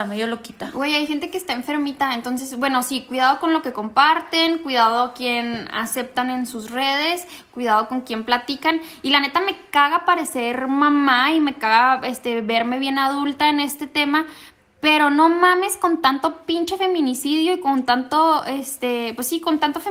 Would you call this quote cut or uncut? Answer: uncut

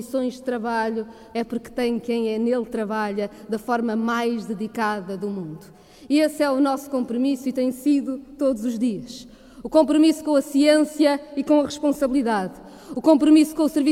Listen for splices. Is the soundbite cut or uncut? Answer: cut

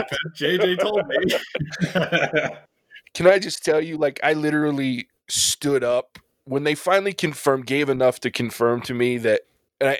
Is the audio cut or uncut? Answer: uncut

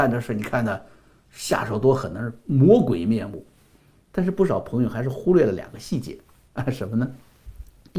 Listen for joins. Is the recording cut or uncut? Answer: uncut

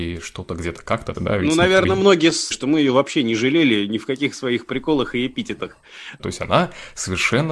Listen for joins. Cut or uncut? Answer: cut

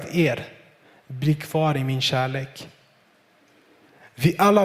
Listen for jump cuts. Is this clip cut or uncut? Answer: uncut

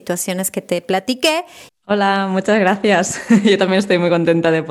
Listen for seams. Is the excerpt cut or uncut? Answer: cut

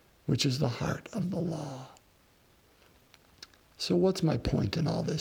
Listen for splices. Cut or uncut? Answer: uncut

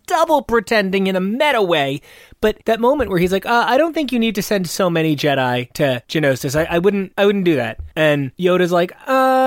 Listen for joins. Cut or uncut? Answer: uncut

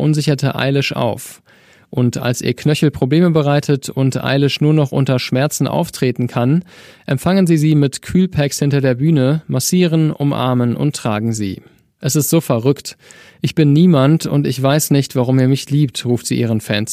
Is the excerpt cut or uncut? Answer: cut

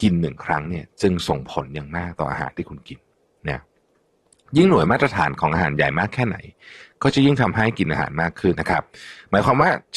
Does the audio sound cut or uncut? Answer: cut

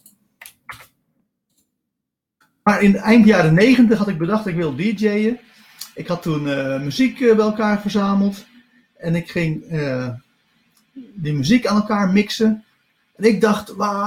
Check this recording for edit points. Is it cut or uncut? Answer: uncut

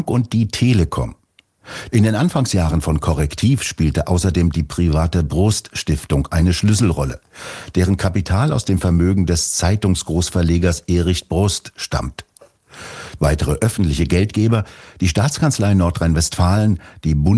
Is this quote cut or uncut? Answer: cut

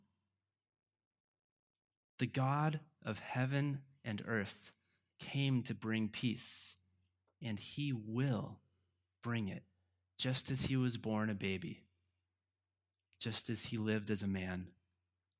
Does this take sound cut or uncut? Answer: uncut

